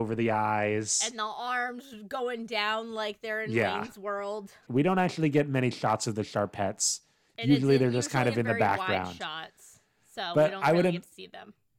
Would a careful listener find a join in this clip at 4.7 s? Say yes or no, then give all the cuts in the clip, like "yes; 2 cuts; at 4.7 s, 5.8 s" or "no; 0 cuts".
yes; 1 cut; at 4.7 s